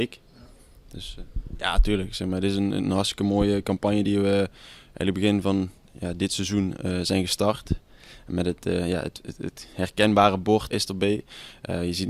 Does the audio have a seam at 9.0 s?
no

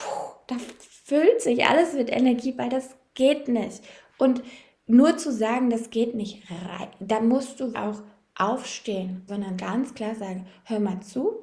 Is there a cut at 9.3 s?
yes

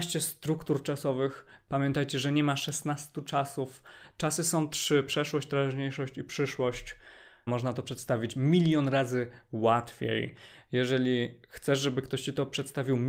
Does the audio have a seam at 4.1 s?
no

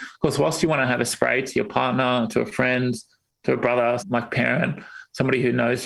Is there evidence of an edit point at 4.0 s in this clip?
yes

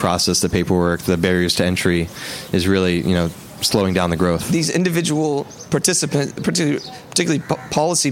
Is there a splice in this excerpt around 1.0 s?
no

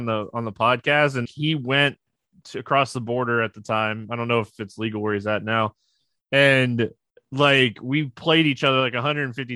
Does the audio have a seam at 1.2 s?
yes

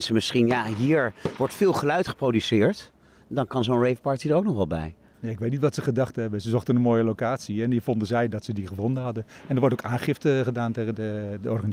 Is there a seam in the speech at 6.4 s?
no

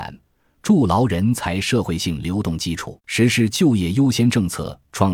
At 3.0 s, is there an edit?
yes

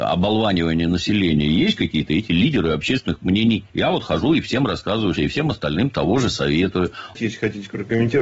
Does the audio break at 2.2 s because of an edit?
no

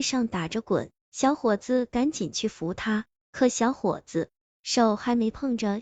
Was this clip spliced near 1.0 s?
yes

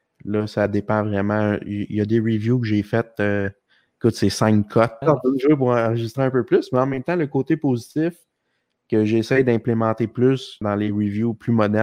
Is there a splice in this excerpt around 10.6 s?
yes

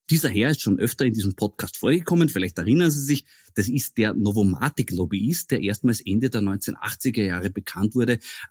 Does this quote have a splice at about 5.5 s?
no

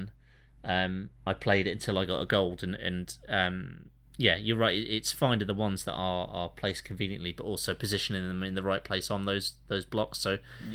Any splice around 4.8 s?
no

